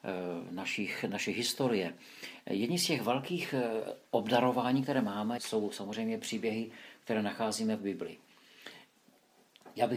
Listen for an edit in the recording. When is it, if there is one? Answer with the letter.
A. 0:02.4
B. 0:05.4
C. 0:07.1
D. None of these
B